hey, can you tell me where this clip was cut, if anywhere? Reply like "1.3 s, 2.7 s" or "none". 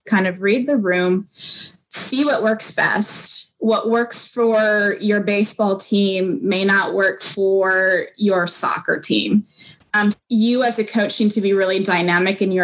10.1 s